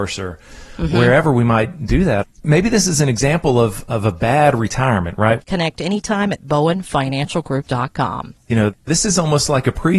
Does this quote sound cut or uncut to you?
cut